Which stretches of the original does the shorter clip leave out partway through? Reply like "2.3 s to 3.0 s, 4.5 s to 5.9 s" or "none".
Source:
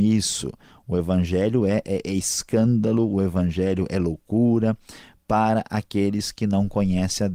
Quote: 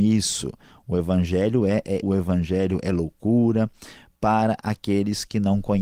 2.0 s to 3.1 s